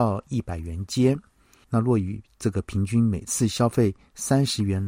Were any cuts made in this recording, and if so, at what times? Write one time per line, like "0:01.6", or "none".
0:01.6